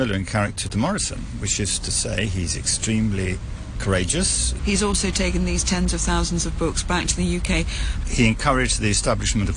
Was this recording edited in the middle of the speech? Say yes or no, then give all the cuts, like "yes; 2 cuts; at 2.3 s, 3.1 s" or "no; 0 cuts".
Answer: yes; 2 cuts; at 4.6 s, 8.0 s